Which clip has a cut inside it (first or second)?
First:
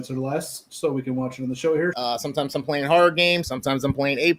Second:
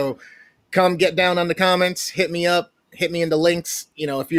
first